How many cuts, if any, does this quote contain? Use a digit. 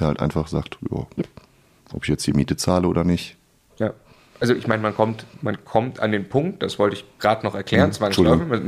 1